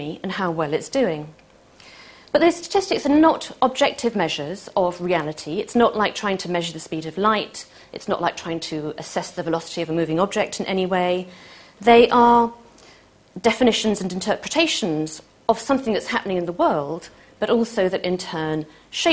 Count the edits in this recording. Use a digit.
0